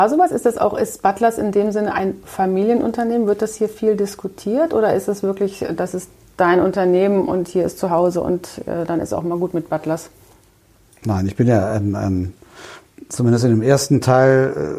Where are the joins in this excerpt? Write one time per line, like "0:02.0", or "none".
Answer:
none